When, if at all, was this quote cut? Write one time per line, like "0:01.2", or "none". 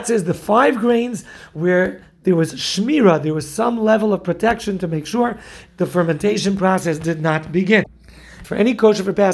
0:08.4